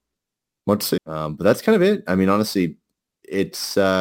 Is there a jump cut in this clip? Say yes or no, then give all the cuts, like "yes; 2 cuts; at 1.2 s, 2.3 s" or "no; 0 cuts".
yes; 1 cut; at 1.0 s